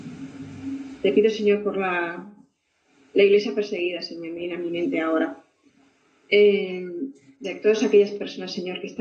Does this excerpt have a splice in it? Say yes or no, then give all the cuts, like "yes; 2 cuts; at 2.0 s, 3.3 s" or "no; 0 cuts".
no; 0 cuts